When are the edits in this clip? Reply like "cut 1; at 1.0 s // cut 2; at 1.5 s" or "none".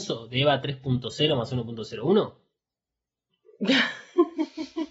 cut 1; at 3.3 s